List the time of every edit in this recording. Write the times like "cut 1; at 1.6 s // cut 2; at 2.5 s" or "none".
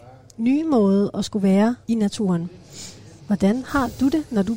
cut 1; at 1.8 s

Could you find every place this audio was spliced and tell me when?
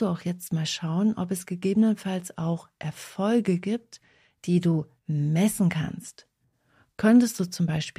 none

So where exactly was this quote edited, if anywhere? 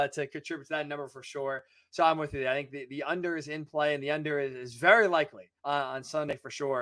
cut 1; at 5.6 s

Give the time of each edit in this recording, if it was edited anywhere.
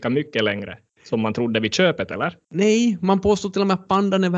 none

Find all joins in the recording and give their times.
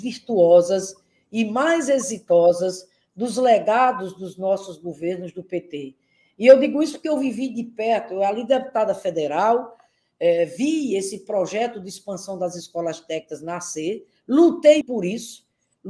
cut 1; at 14.8 s

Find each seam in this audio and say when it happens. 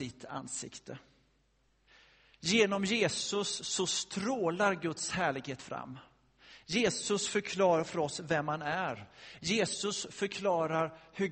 none

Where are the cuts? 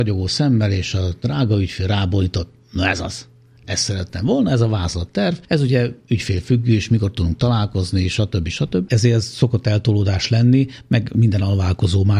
cut 1; at 8.9 s

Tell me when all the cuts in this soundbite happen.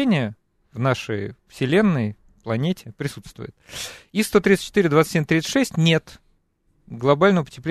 none

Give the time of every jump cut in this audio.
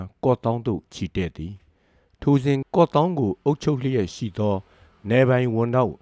cut 1; at 2.6 s

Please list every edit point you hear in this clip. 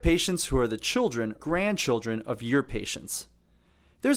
cut 1; at 1.4 s

